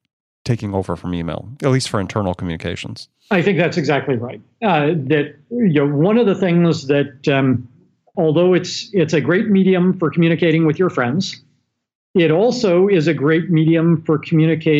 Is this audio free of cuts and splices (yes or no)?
no